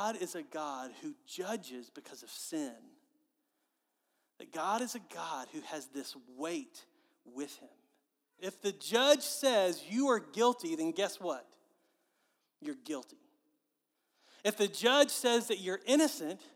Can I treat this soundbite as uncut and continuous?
no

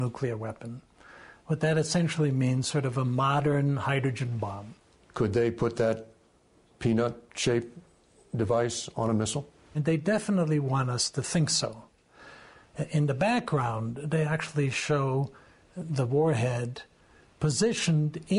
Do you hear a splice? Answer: no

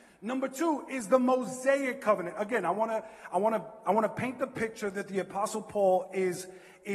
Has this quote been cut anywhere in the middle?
no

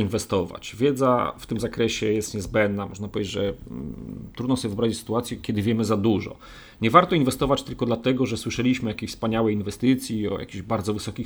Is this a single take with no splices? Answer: yes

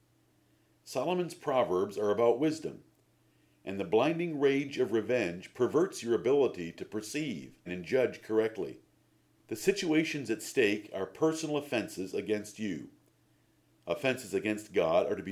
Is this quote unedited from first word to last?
no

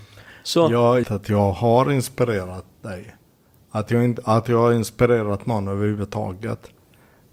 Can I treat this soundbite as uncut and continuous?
no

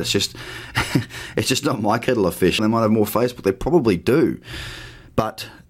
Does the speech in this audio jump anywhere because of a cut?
yes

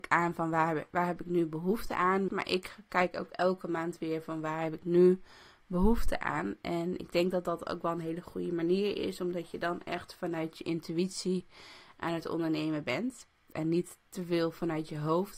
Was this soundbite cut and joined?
yes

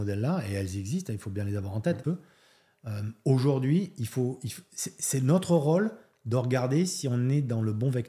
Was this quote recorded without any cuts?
no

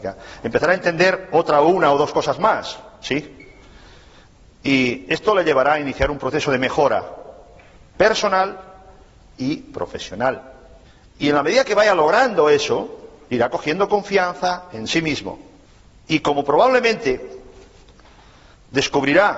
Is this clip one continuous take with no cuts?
yes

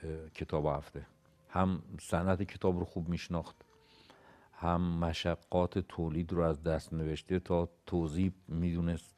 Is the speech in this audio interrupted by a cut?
no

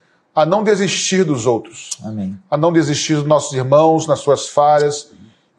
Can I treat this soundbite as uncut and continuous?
yes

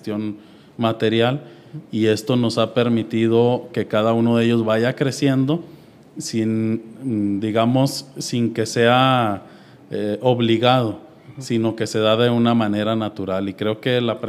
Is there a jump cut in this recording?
no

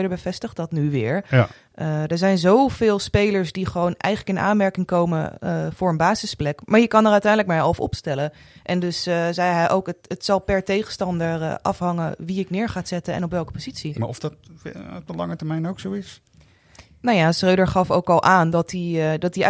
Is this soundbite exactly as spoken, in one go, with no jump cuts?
no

